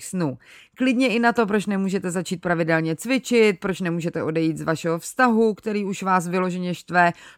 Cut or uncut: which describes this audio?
uncut